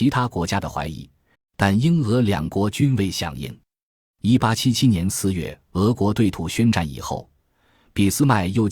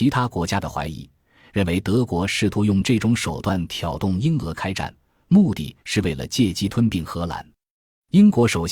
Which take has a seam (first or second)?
first